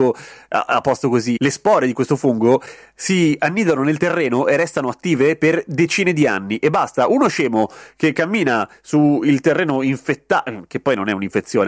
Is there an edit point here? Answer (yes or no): no